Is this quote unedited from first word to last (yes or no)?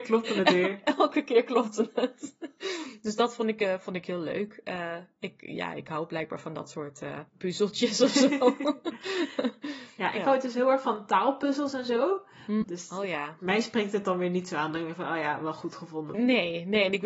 no